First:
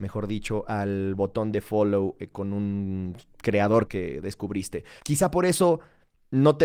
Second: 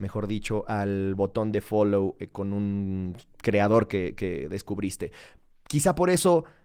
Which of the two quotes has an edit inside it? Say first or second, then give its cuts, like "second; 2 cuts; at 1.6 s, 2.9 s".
first; 2 cuts; at 3.9 s, 5.0 s